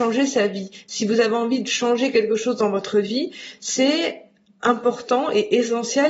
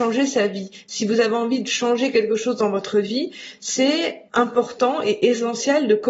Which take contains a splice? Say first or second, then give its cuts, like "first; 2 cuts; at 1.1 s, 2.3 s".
second; 1 cut; at 4.3 s